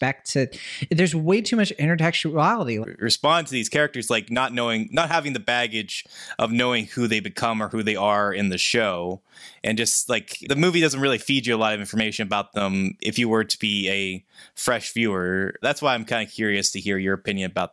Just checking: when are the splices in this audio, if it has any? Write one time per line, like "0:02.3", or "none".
0:02.8
0:10.4
0:15.6